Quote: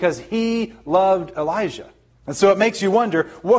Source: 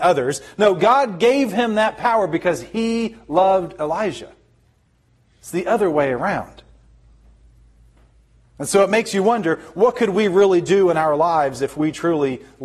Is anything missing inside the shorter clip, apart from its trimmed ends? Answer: yes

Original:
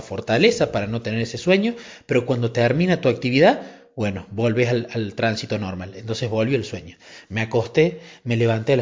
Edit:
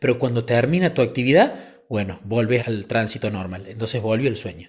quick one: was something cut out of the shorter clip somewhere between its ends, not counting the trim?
yes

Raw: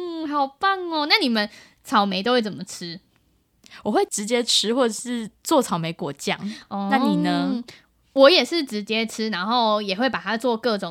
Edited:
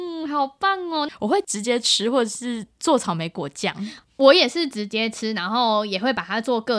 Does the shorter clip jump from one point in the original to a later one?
yes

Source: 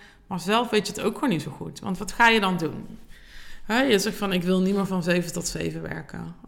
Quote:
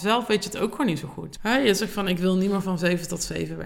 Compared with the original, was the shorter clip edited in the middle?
yes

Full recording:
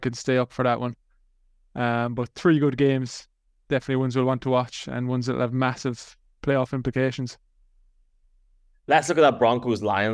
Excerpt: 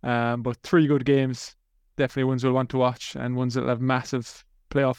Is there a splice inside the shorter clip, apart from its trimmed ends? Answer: no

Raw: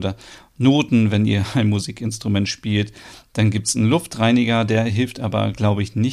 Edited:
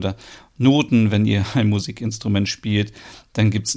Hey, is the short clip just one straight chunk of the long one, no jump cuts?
yes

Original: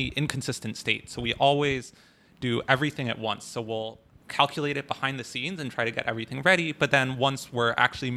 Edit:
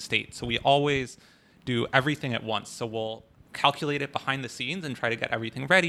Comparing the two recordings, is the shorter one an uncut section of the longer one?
yes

